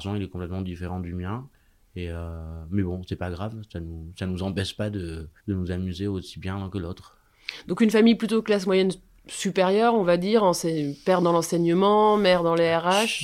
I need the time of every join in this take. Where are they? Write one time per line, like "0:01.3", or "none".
0:05.4